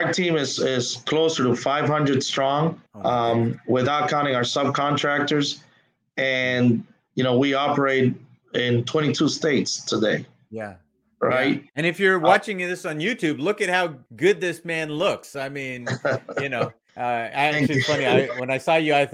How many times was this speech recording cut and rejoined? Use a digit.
3